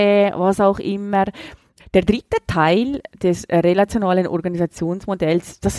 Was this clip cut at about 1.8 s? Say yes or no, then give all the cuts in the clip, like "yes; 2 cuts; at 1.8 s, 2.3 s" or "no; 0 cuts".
yes; 1 cut; at 1.8 s